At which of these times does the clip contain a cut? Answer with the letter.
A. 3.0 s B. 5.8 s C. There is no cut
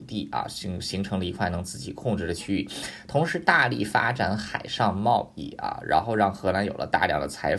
C